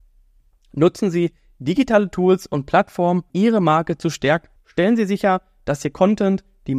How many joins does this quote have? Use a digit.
2